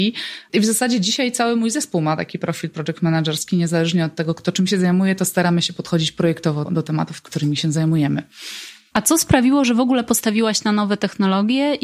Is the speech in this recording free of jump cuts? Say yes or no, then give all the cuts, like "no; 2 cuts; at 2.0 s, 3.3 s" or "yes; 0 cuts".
no; 1 cut; at 6.6 s